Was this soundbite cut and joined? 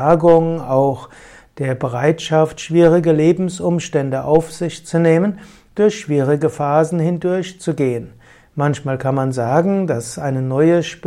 no; 0 cuts

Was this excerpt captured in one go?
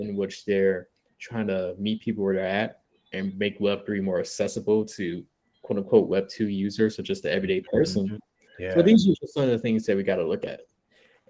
no; 1 cut; at 8.4 s

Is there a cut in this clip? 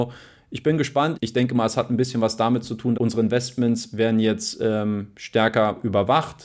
yes; 2 cuts; at 1.1 s, 2.9 s

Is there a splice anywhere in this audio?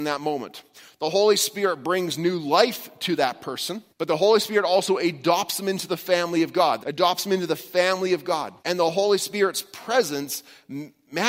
yes; 3 cuts; at 3.9 s, 6.8 s, 8.6 s

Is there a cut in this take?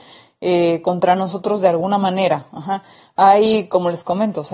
no; 0 cuts

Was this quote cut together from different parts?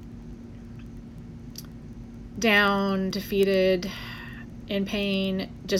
no; 0 cuts

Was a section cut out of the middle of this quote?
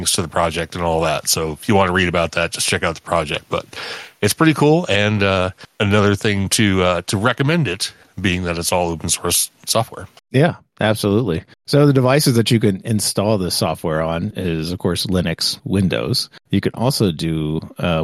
yes; 1 cut; at 15.6 s

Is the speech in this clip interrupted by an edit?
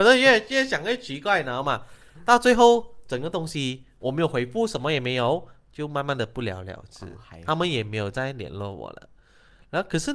no; 0 cuts

